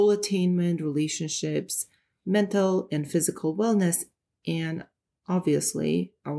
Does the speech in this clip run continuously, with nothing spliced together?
yes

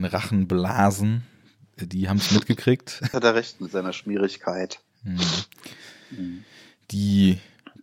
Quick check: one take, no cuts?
no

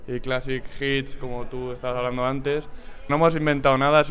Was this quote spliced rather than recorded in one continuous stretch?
yes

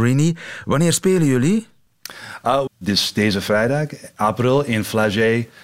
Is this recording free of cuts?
no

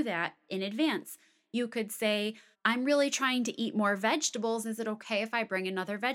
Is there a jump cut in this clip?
yes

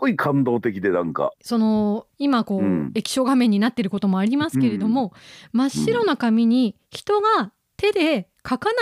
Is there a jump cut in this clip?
yes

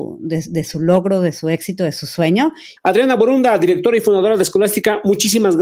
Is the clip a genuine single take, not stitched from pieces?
no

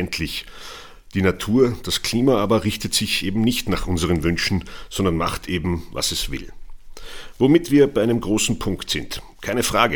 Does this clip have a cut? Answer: no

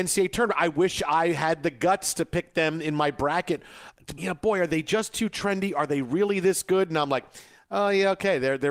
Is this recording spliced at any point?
yes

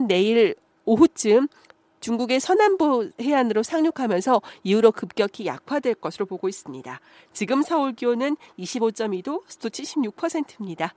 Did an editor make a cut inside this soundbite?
no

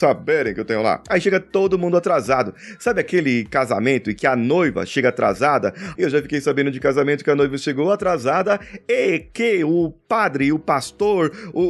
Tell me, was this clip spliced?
yes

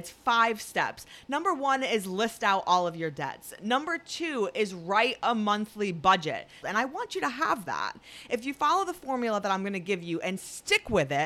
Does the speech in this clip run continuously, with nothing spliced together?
no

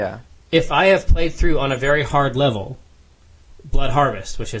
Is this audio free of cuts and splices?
yes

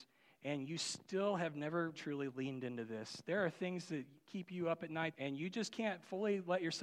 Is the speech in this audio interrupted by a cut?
yes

